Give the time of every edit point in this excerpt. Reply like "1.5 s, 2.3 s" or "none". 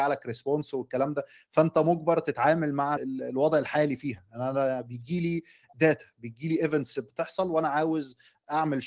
3.0 s

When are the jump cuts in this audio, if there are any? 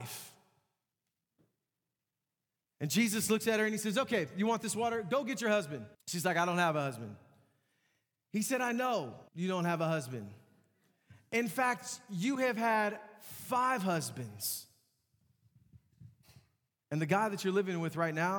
5.9 s, 9.3 s

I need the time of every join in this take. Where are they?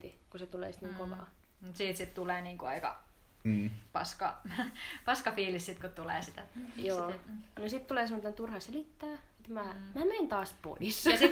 none

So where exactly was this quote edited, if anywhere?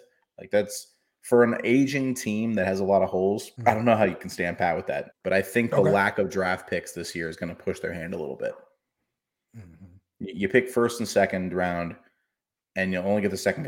3.6 s, 5.1 s

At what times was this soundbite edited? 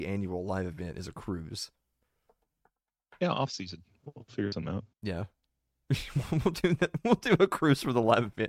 4.9 s

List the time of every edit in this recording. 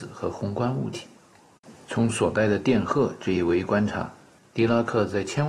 none

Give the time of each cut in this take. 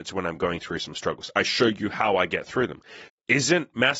3.1 s

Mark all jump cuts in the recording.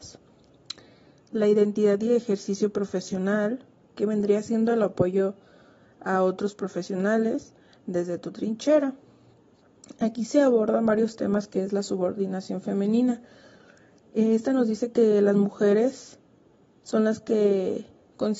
3.9 s

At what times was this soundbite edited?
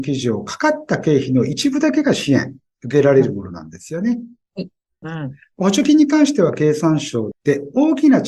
5.0 s, 7.3 s

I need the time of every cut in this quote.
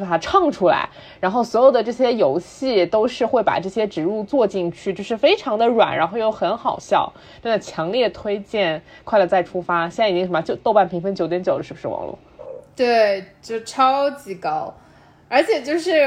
none

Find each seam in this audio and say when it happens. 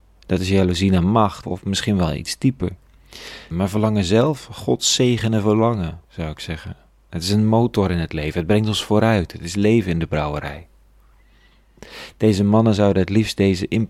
1.4 s, 3.5 s, 6.0 s

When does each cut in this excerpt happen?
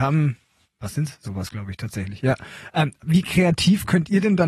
1.2 s

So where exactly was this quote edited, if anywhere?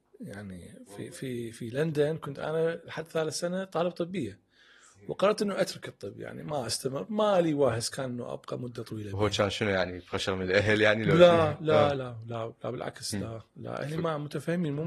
12.0 s

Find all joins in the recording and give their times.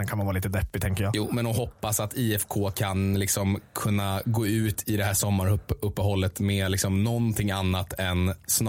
none

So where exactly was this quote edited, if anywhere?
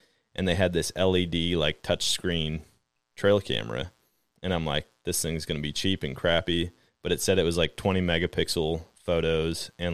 none

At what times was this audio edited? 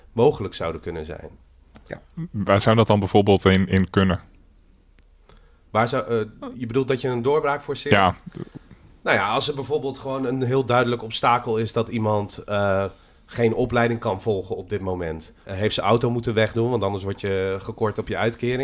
15.4 s

